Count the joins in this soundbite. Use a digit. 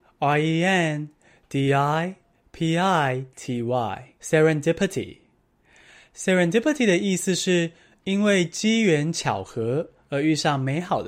1